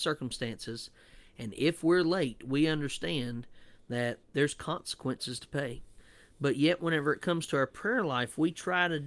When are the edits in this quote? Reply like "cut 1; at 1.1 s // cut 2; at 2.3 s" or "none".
none